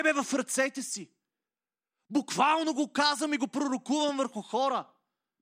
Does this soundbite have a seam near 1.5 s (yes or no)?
no